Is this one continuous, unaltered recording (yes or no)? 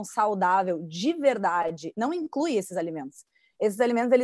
no